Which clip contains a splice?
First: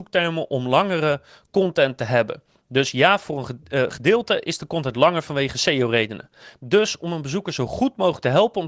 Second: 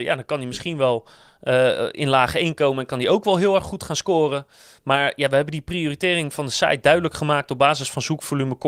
first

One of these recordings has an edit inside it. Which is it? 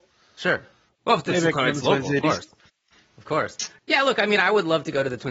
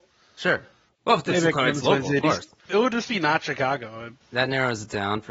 second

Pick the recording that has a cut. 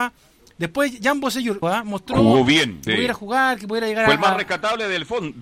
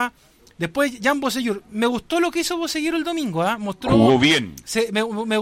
first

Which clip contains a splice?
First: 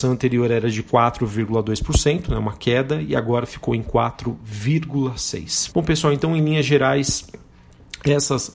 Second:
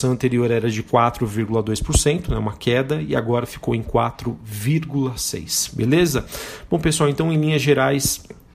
first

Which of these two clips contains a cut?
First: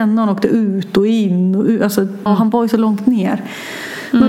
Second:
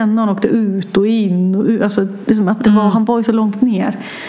first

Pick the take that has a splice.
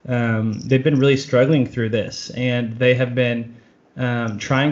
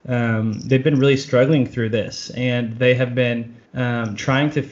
second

